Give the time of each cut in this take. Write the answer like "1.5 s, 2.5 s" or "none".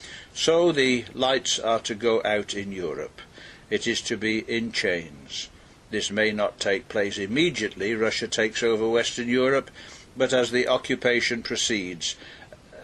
none